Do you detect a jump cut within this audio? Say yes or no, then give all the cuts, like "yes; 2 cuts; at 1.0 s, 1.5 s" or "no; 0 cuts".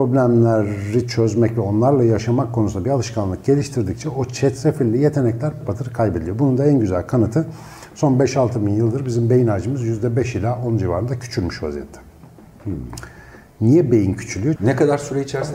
yes; 2 cuts; at 5.6 s, 14.6 s